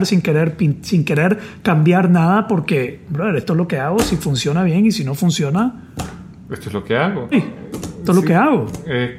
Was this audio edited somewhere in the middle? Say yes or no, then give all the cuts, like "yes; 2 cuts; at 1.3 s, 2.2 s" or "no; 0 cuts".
yes; 1 cut; at 7.3 s